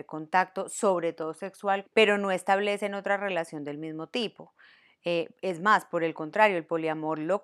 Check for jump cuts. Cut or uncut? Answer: cut